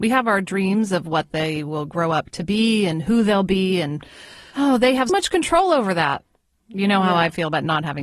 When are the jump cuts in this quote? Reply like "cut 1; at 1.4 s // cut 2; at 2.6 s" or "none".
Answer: cut 1; at 5.1 s